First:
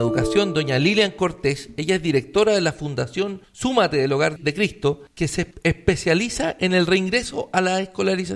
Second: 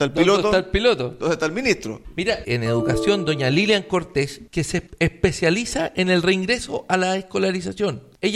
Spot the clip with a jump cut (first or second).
second